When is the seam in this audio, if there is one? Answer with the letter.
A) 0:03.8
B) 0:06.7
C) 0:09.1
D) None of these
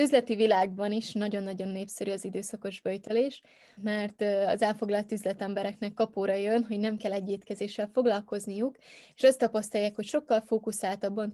A